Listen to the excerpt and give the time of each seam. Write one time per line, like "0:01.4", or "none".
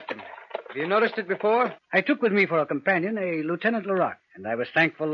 0:01.8
0:04.2